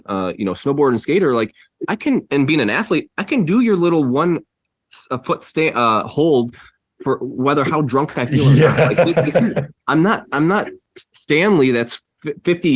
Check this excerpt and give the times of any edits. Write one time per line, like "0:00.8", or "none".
none